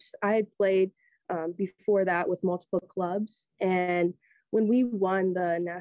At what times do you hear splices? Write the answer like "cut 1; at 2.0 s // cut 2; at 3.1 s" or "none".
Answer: none